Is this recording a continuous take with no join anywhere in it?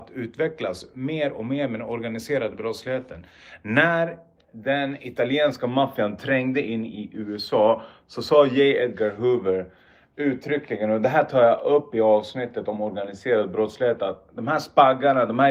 yes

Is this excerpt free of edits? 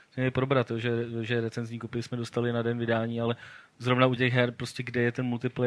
no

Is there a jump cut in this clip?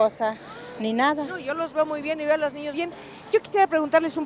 yes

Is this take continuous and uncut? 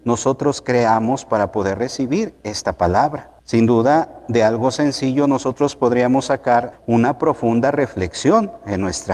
no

